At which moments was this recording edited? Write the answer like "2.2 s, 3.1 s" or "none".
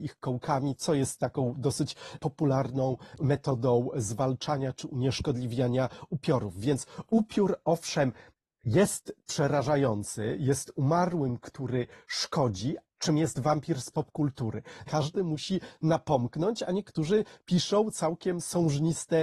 12.8 s, 14.8 s